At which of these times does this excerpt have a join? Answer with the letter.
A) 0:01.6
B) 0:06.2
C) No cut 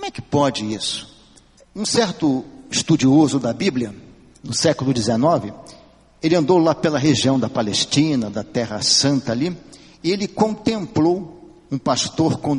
A